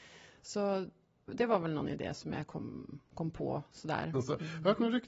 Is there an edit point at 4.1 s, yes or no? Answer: yes